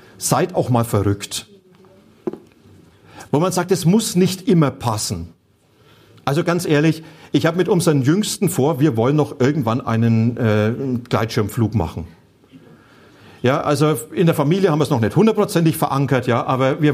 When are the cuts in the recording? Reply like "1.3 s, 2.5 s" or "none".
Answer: 3.3 s